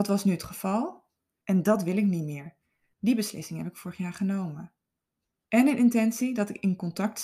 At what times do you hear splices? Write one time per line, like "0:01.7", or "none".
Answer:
0:01.4
0:02.9
0:05.5

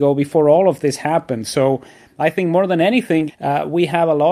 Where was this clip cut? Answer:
0:03.3

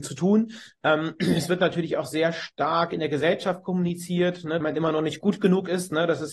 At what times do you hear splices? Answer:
0:04.6

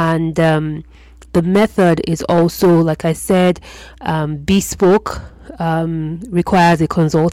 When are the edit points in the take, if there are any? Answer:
none

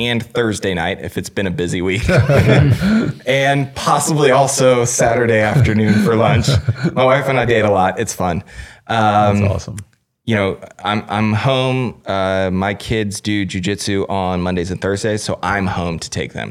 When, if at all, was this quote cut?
none

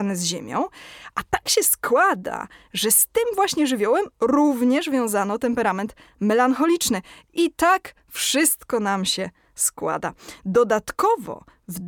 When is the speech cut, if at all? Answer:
none

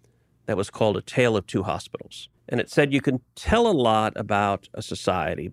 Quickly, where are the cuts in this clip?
0:02.4

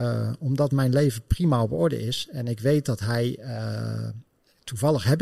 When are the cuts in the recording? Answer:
none

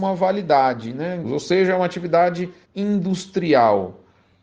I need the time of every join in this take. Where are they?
0:01.2
0:02.6

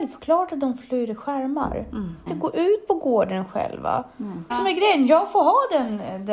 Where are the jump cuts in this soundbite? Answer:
0:02.3
0:04.5

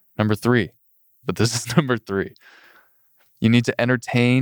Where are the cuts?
0:01.2

